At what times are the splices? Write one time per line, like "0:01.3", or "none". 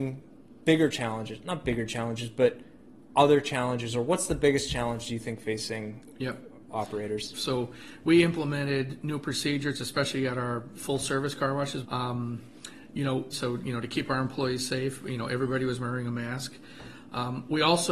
0:07.3
0:11.8
0:13.3